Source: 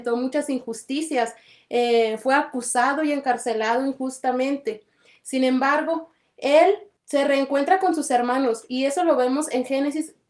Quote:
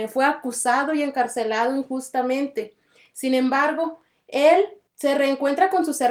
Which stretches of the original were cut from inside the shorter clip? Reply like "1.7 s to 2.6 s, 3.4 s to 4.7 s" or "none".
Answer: none